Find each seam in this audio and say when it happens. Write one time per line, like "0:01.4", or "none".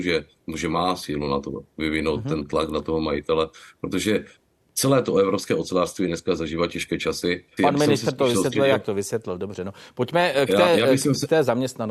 0:07.6